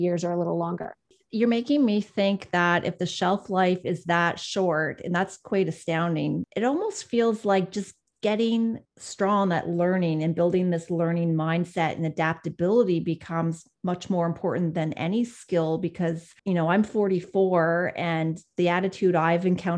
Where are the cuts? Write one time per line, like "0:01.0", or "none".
0:08.9
0:16.4

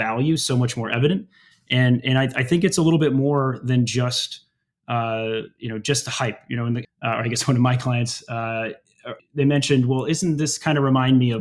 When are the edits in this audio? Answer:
0:06.8
0:09.2

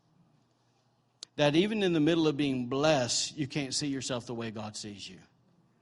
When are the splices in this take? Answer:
0:01.2

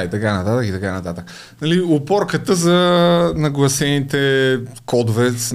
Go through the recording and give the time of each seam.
none

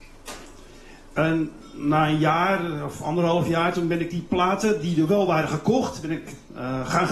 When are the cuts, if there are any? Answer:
none

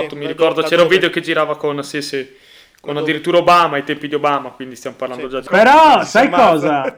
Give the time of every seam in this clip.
0:05.5

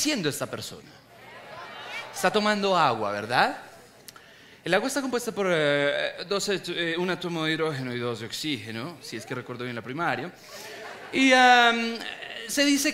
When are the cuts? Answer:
none

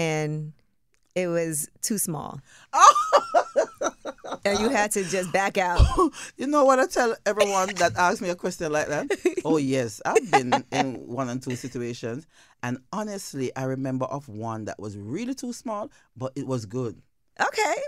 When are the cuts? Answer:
none

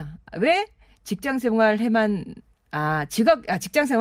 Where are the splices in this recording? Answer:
none

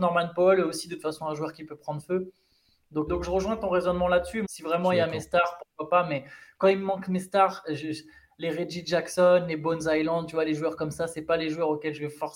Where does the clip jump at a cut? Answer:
0:03.1
0:04.4

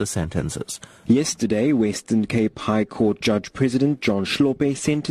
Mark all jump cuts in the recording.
0:01.1

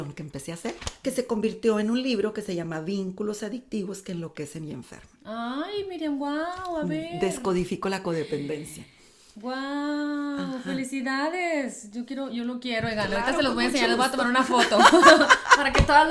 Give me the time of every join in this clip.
none

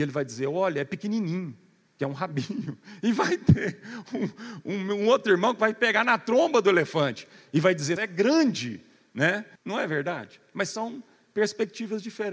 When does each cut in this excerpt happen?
0:08.0
0:09.6

